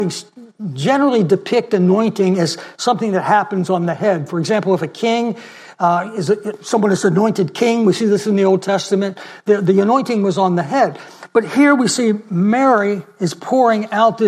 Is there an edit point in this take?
no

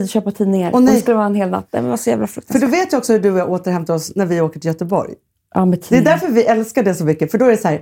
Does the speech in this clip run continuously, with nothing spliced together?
yes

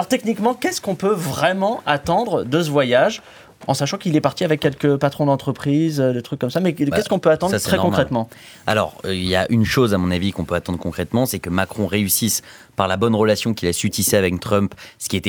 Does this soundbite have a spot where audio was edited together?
no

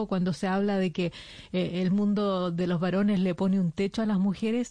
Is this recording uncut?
yes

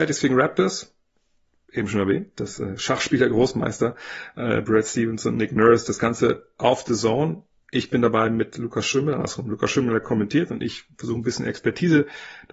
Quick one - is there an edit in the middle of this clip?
no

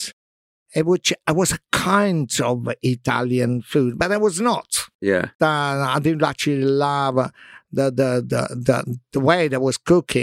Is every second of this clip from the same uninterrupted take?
no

